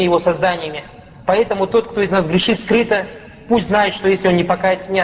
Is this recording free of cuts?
yes; 0 cuts

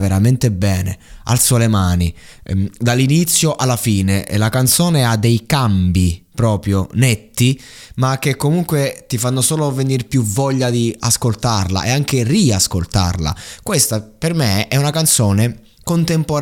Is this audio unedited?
yes; 0 cuts

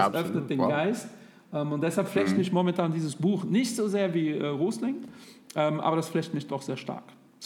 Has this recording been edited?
no; 0 cuts

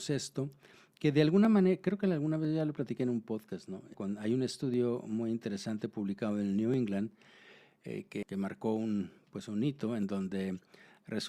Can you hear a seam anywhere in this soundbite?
yes; 2 cuts; at 3.9 s, 8.2 s

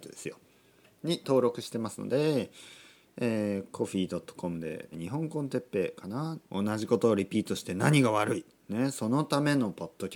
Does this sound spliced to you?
yes; 2 cuts; at 4.9 s, 6.4 s

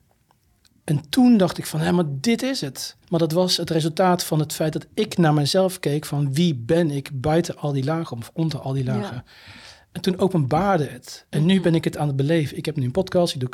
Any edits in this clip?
yes; 1 cut; at 3.0 s

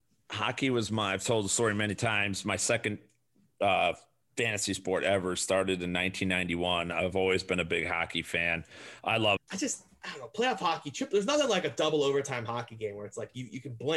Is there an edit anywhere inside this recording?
yes; 1 cut; at 9.4 s

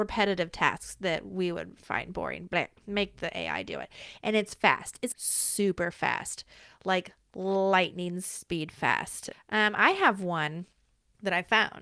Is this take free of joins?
no; 2 cuts; at 5.1 s, 9.3 s

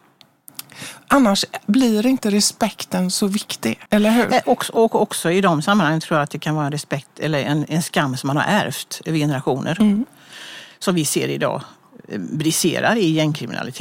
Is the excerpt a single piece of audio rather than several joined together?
no; 1 cut; at 3.9 s

